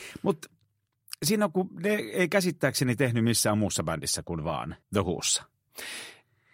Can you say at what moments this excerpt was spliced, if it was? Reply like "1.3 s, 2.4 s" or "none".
4.8 s

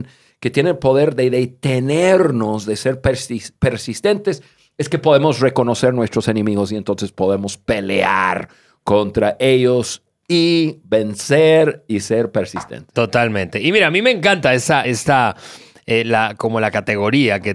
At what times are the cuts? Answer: none

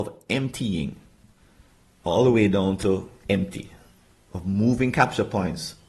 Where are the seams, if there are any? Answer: none

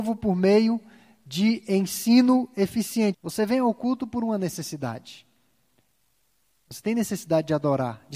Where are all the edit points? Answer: 3.1 s

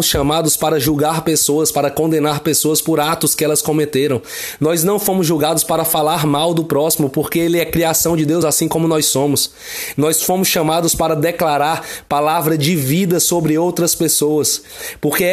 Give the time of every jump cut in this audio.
none

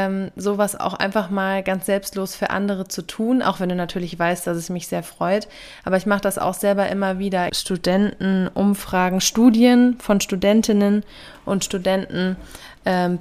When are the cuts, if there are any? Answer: 7.5 s

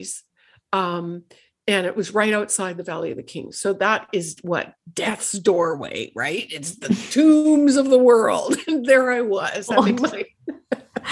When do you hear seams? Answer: none

